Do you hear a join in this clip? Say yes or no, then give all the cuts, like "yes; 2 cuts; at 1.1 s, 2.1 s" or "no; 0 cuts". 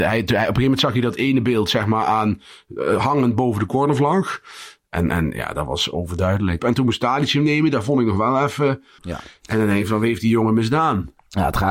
yes; 2 cuts; at 6.6 s, 9.0 s